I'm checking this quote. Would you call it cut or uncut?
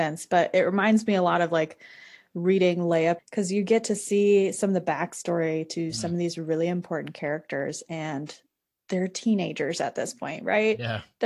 cut